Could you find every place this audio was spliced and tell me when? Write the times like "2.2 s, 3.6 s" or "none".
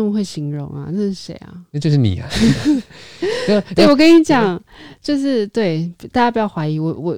none